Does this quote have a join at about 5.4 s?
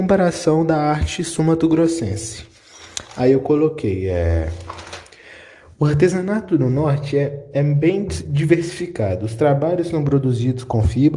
no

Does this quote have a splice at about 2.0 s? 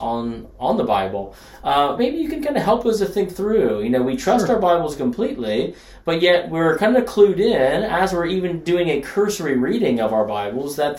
yes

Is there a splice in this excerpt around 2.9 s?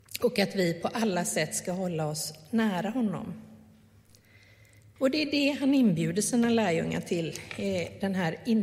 no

